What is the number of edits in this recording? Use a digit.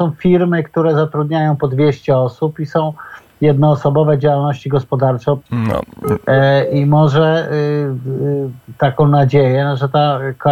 0